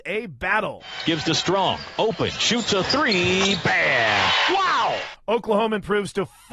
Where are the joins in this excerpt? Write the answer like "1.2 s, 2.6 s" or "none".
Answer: 4.5 s